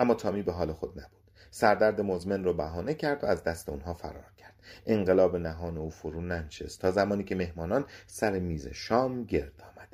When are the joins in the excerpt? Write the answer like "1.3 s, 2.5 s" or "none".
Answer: none